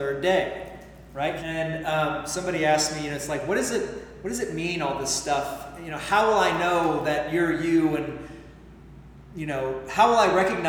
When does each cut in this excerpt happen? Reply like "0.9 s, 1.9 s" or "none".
1.4 s

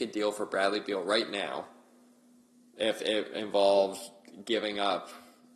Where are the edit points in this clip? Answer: none

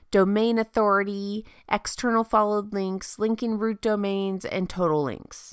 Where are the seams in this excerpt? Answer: none

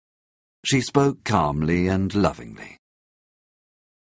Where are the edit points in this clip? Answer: 1.2 s

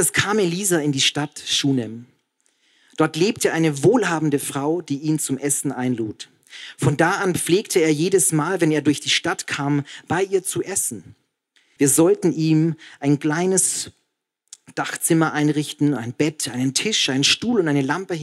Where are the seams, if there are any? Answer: 11.8 s

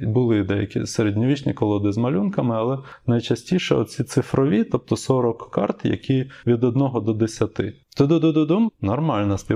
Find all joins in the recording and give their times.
7.8 s

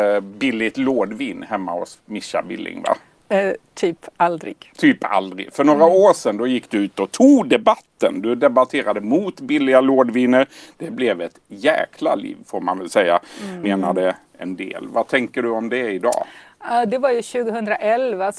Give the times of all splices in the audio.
13.6 s, 16.9 s

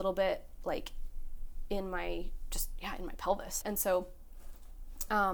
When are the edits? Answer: 3.6 s

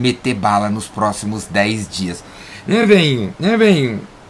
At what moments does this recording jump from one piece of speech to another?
none

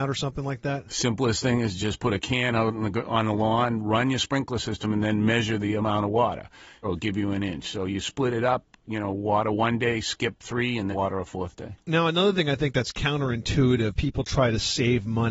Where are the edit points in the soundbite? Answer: 6.8 s, 10.9 s

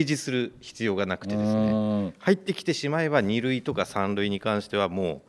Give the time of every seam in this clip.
none

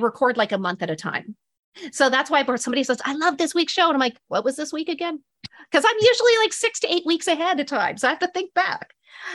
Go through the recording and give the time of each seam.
none

